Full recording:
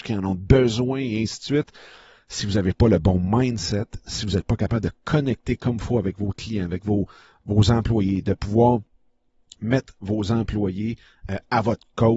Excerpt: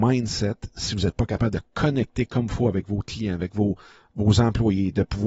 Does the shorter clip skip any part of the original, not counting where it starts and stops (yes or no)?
no